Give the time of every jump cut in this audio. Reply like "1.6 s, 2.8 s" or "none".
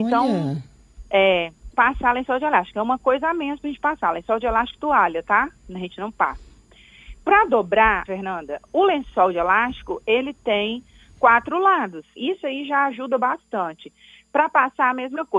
1.7 s, 8.1 s, 12.2 s